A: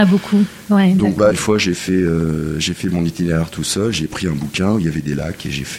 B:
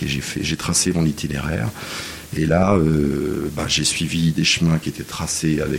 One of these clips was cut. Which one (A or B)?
A